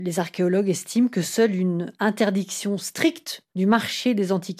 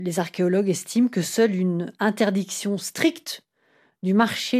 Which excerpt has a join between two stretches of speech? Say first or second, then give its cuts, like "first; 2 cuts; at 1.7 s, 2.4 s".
first; 1 cut; at 3.5 s